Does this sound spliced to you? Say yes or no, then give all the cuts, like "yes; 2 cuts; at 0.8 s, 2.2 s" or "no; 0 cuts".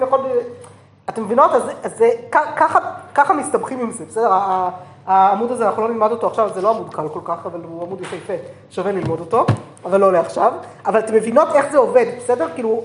no; 0 cuts